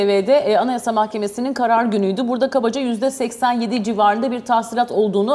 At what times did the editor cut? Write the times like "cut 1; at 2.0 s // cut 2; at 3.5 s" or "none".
none